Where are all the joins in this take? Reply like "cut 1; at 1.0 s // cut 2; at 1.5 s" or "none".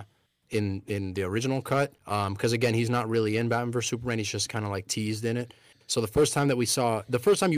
cut 1; at 2.0 s